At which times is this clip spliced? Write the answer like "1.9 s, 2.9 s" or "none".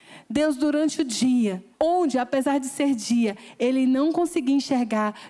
1.7 s